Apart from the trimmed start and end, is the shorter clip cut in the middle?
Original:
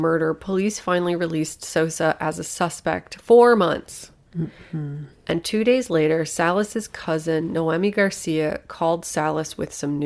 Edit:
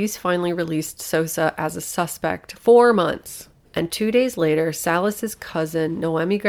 yes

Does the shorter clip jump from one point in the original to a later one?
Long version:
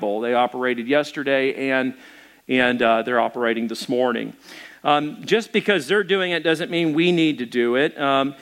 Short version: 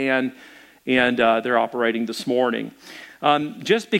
no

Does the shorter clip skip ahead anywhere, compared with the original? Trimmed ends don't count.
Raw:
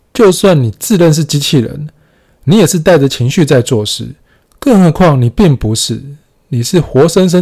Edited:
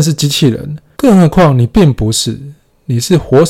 yes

